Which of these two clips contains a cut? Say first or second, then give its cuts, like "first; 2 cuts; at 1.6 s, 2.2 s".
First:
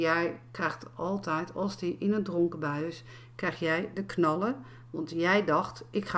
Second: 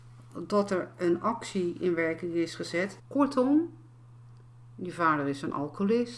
second; 1 cut; at 3.0 s